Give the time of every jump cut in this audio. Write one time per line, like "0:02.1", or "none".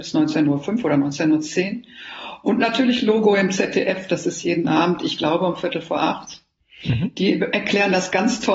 none